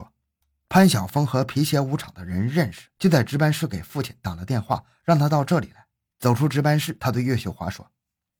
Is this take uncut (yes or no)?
yes